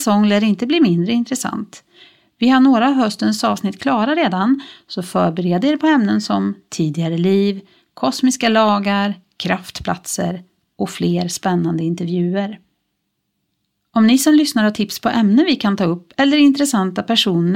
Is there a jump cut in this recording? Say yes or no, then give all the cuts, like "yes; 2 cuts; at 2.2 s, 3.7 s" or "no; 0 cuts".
no; 0 cuts